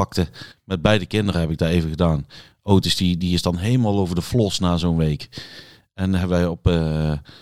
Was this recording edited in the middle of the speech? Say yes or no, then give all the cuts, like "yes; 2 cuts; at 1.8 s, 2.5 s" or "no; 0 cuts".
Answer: no; 0 cuts